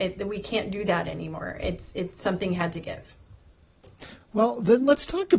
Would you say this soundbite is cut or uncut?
uncut